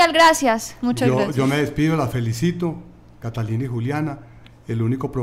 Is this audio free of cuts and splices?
no; 1 cut; at 3.2 s

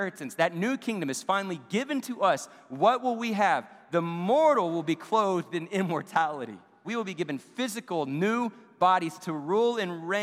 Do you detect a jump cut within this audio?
yes; 1 cut; at 6.8 s

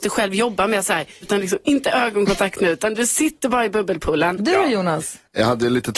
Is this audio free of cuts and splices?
no; 2 cuts; at 1.2 s, 4.4 s

